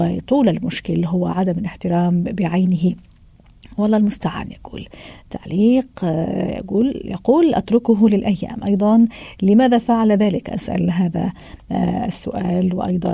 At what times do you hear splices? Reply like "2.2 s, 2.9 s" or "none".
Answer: none